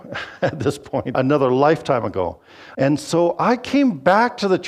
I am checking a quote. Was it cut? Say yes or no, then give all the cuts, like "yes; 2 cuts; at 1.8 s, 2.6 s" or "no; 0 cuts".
yes; 2 cuts; at 1.1 s, 2.7 s